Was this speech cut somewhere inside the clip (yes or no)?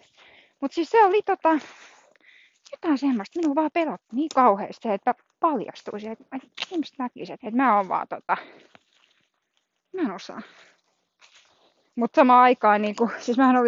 yes